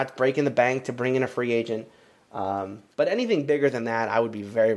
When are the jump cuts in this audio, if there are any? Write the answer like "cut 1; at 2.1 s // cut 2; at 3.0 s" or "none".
cut 1; at 2.9 s

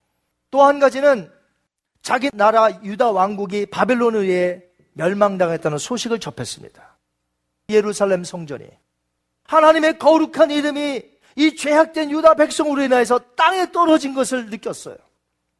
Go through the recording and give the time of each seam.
cut 1; at 7.7 s

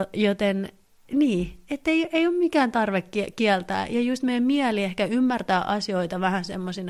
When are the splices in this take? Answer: none

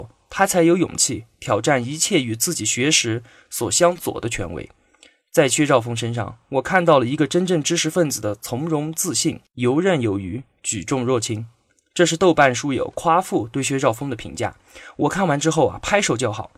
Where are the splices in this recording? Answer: none

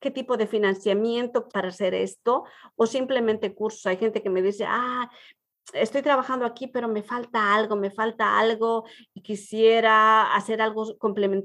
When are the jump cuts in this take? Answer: cut 1; at 1.5 s

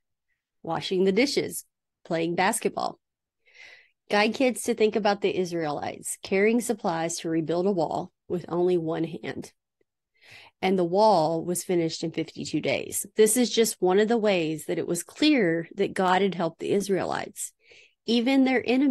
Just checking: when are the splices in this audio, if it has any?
cut 1; at 13.1 s

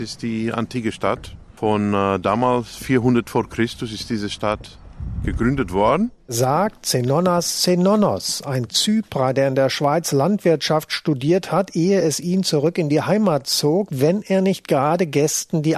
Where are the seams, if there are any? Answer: cut 1; at 13.9 s

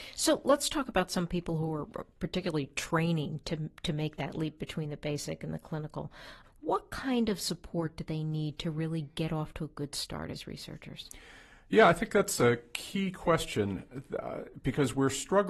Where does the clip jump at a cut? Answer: cut 1; at 6.4 s

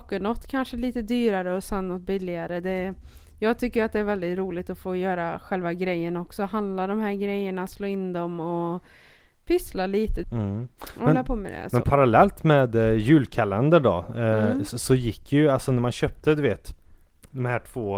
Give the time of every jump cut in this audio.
cut 1; at 10.2 s

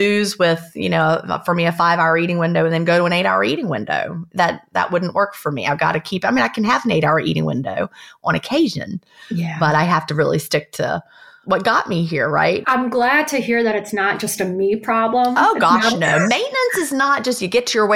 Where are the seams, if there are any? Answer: cut 1; at 12.6 s

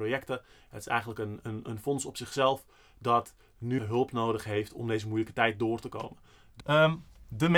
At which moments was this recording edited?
cut 1; at 3.8 s // cut 2; at 6.6 s

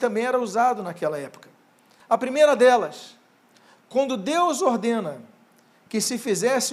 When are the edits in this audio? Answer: cut 1; at 2.0 s

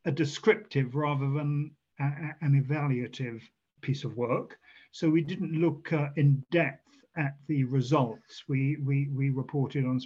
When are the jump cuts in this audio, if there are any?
none

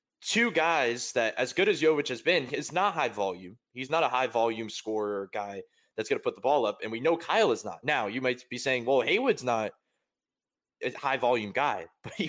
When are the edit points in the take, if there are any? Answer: cut 1; at 7.8 s

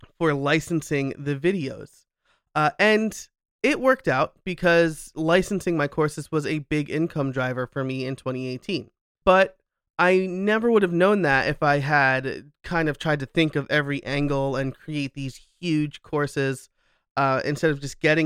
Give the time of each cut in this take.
cut 1; at 9.2 s

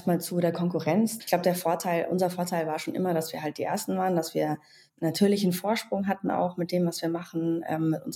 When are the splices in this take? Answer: cut 1; at 1.2 s

